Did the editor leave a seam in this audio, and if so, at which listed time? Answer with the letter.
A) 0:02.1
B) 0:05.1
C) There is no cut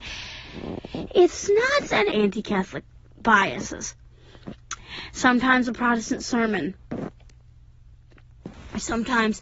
A